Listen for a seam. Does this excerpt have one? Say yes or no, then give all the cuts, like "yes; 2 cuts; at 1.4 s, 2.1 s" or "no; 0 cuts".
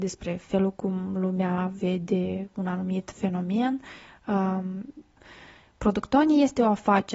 yes; 1 cut; at 5.2 s